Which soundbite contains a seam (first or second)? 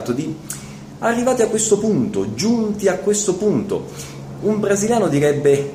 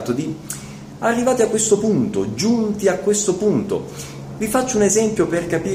second